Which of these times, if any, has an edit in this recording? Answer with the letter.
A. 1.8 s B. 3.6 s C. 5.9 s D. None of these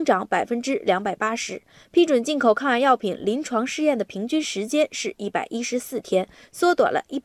D